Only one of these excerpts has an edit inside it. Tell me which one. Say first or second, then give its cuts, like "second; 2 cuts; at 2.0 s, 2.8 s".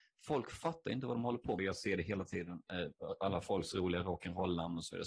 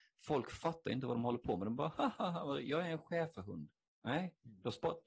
first; 1 cut; at 1.6 s